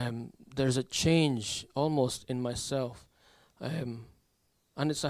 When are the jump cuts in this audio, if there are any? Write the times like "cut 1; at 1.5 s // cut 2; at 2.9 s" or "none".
none

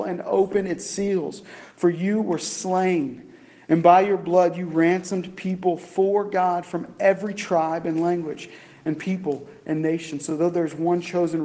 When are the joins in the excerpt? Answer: none

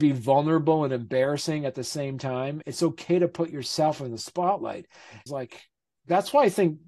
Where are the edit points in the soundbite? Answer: cut 1; at 2.6 s // cut 2; at 5.3 s

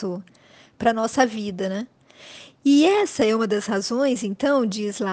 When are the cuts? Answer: none

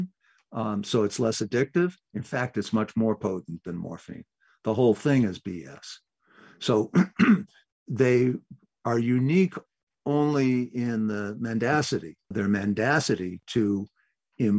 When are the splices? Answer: cut 1; at 7.7 s // cut 2; at 12.3 s

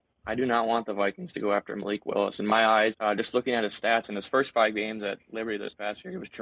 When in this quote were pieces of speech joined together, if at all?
cut 1; at 2.9 s

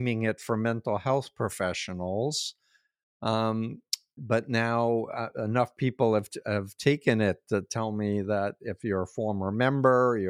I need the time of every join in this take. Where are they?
cut 1; at 4.2 s

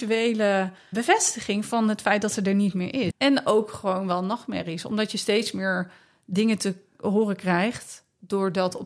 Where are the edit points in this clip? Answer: cut 1; at 0.9 s // cut 2; at 3.1 s

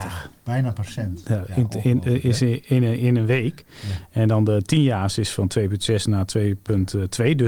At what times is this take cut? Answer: none

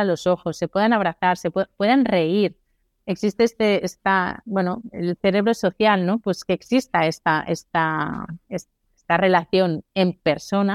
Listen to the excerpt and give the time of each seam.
none

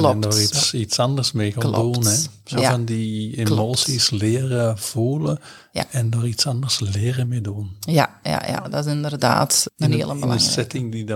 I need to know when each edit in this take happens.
none

